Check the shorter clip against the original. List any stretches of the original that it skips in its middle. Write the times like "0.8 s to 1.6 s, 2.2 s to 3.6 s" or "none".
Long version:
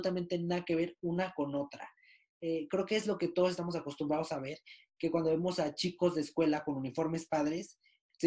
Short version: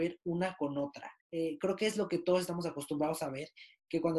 2.0 s to 2.3 s